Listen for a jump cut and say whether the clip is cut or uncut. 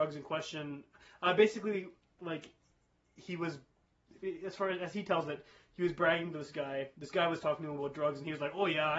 uncut